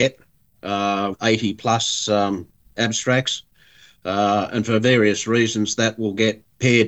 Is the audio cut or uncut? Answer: cut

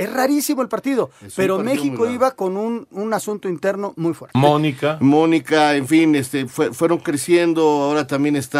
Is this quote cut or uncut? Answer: cut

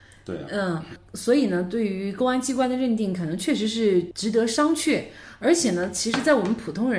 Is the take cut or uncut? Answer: uncut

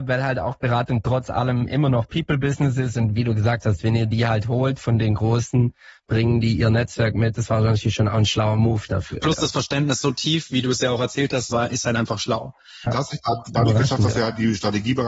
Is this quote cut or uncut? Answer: cut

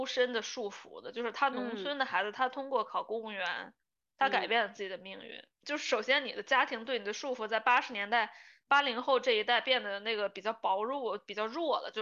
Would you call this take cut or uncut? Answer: cut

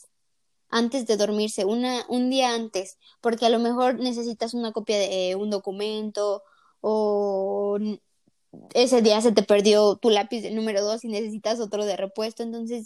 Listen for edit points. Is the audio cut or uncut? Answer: uncut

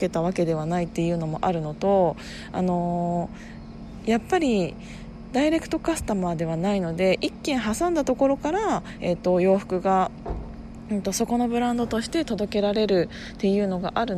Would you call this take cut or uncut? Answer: uncut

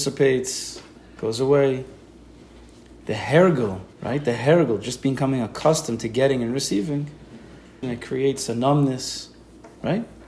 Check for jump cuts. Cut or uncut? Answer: cut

